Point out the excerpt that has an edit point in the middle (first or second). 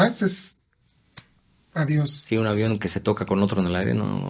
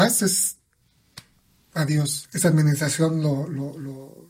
second